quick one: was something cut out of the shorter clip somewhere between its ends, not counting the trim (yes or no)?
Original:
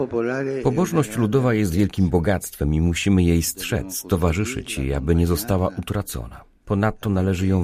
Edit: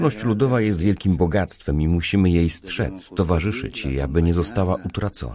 no